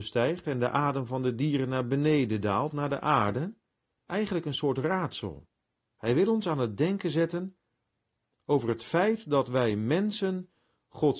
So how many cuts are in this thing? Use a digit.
2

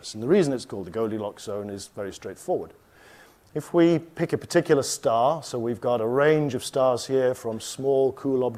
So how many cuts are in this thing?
0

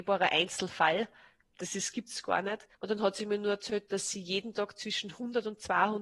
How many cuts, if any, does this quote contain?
1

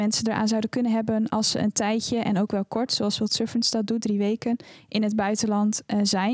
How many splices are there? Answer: 0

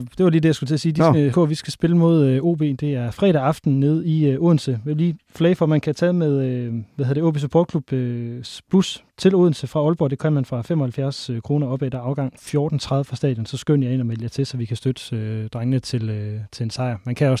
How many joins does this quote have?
1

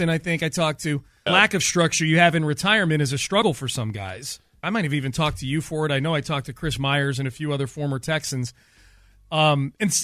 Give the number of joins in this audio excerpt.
2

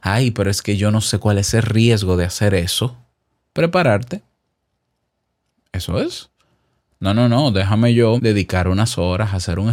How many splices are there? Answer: 2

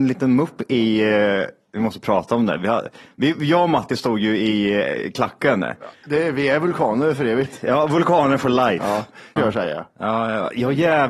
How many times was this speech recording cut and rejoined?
1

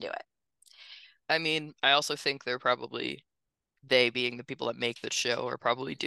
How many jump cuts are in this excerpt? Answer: 1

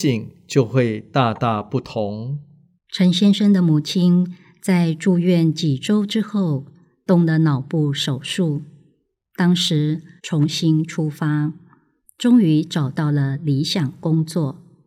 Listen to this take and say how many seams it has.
2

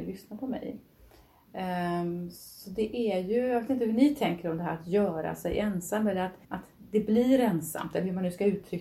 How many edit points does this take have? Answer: 1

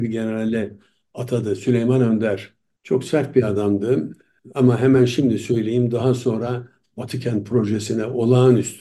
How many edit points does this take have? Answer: 0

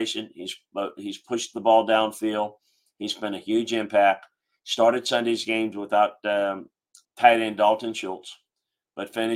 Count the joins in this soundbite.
1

